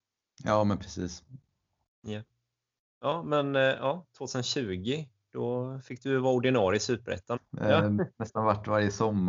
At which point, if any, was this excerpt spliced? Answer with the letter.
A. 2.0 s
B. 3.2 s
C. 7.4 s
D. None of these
C